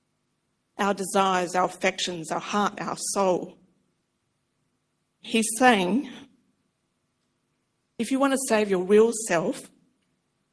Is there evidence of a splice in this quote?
yes; 1 cut; at 5.2 s

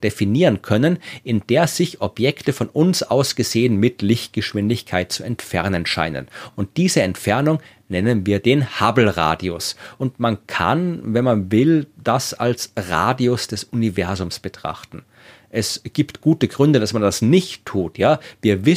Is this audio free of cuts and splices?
yes; 0 cuts

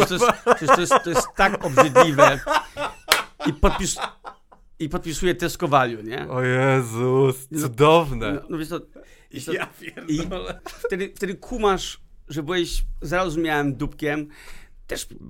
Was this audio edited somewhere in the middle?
yes; 2 cuts; at 8.4 s, 10.6 s

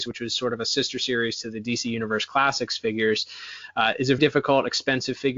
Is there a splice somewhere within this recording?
yes; 1 cut; at 4.2 s

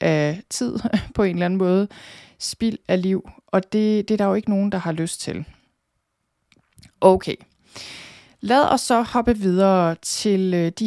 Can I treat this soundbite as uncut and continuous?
yes; 0 cuts

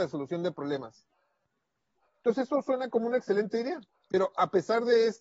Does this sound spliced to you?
no; 0 cuts

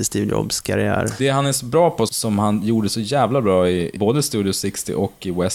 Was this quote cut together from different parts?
no; 0 cuts

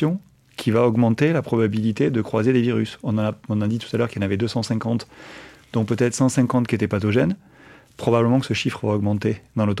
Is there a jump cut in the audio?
no; 0 cuts

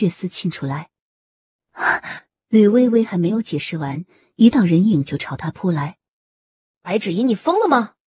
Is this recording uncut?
no; 1 cut; at 2.3 s

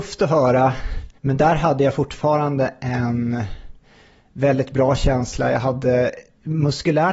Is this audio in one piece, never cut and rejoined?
no; 1 cut; at 1.2 s

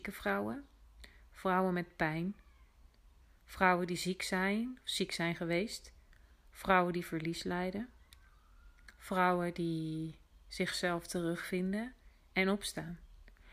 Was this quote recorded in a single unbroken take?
yes; 0 cuts

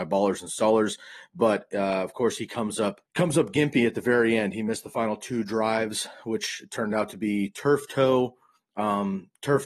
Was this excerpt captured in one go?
no; 1 cut; at 3.1 s

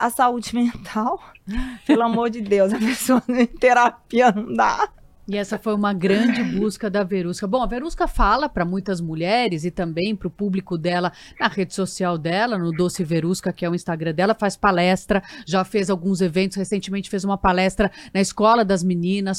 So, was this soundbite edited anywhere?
no; 0 cuts

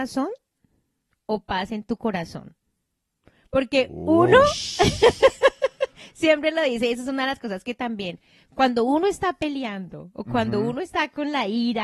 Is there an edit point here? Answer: no; 0 cuts

